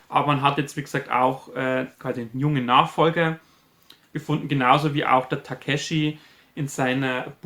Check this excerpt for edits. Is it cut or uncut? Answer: uncut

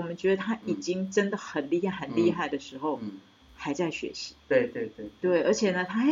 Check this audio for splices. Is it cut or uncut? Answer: uncut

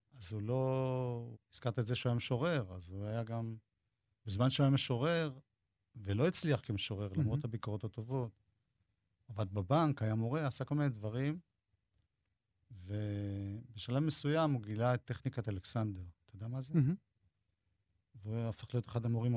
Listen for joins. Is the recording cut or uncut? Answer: cut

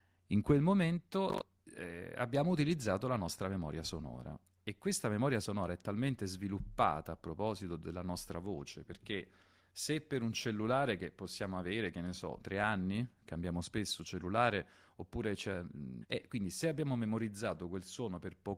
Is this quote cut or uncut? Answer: cut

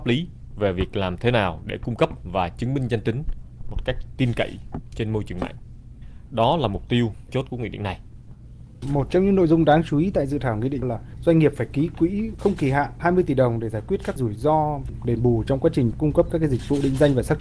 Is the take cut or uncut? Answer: cut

